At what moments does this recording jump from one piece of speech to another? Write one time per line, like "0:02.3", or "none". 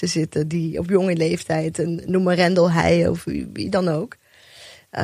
none